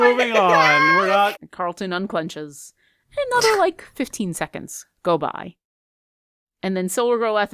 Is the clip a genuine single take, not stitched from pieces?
no; 1 cut; at 1.3 s

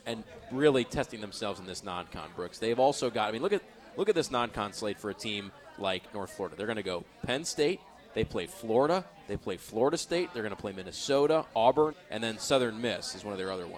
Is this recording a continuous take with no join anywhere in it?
no; 1 cut; at 11.9 s

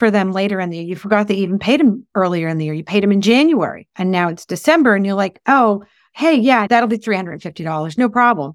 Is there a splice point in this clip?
yes; 1 cut; at 6.7 s

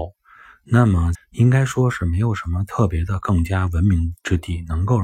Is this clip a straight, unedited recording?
no; 1 cut; at 1.1 s

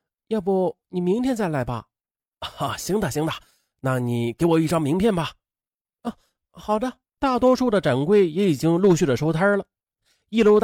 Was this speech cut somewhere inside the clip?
yes; 1 cut; at 7.2 s

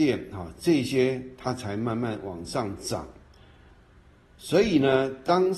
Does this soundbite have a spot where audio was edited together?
no; 0 cuts

